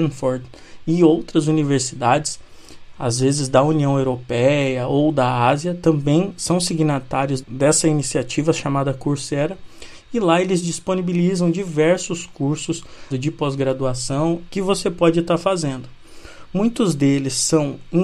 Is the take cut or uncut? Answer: cut